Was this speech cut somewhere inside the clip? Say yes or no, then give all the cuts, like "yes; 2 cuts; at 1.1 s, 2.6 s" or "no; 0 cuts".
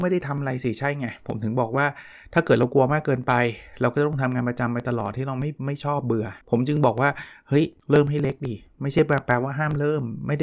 yes; 2 cuts; at 6.4 s, 7.8 s